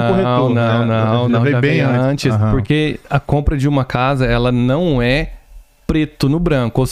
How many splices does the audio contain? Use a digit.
0